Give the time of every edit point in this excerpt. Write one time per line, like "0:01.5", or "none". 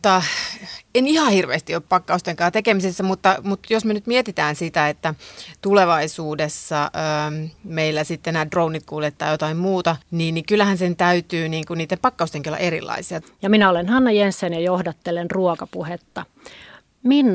0:10.0
0:13.2